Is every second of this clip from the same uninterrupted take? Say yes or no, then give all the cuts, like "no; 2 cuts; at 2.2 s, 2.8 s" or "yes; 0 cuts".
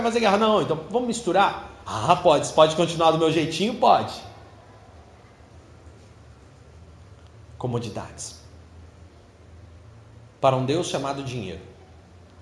no; 1 cut; at 1.8 s